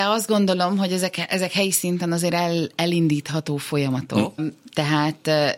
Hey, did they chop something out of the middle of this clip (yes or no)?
yes